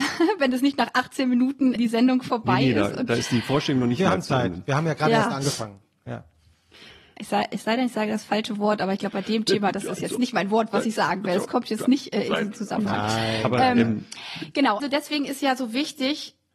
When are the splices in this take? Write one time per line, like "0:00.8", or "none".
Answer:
0:01.8
0:14.8